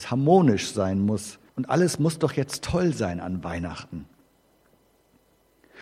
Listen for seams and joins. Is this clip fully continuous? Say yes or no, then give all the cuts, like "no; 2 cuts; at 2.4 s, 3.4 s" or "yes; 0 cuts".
no; 1 cut; at 1.5 s